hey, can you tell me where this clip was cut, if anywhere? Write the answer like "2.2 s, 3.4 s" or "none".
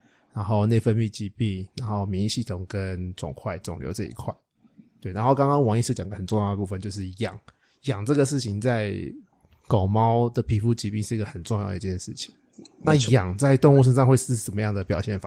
none